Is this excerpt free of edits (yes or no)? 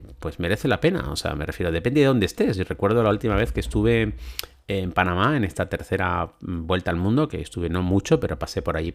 yes